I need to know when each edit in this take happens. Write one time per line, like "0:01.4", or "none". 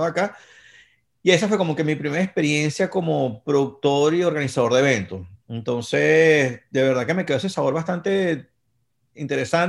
none